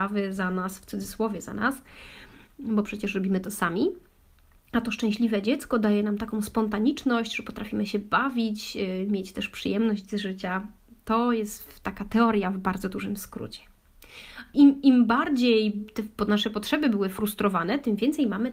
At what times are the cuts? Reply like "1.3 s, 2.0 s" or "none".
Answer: none